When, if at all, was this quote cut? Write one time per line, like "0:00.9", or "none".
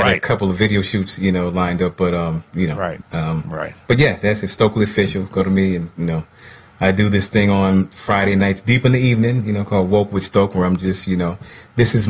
0:03.0